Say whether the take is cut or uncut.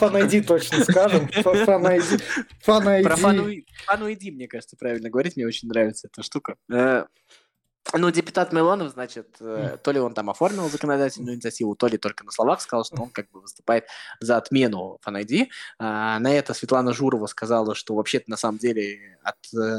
uncut